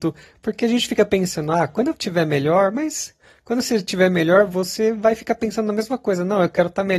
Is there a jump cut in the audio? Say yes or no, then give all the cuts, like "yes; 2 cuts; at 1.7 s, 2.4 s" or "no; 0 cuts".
no; 0 cuts